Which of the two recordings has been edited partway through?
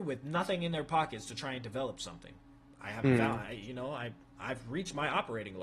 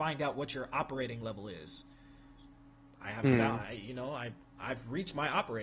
first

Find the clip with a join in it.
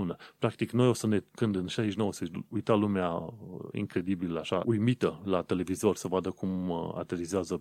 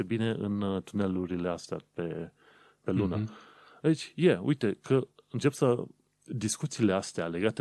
first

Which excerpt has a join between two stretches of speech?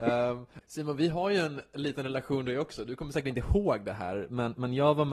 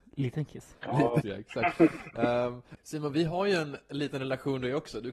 second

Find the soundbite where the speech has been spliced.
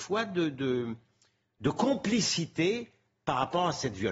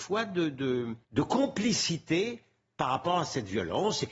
second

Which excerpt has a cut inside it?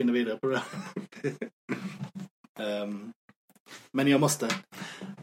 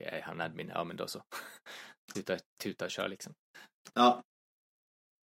second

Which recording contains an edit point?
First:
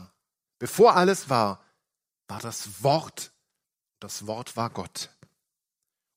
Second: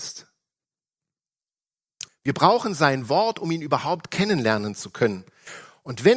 second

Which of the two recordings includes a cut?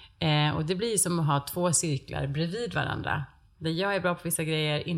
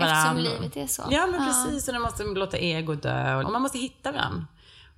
second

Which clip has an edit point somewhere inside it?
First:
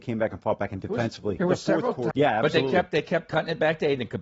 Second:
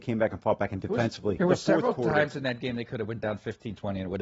first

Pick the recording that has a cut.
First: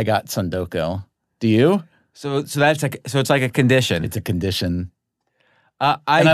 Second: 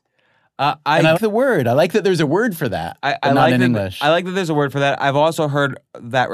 second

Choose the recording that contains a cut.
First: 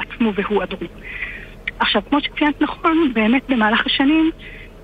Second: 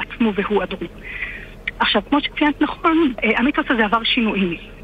second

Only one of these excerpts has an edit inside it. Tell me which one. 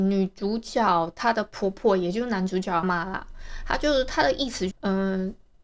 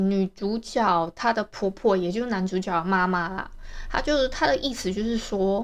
first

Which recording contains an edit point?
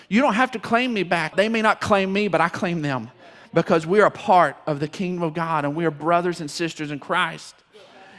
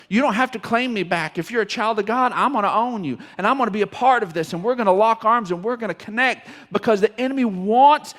first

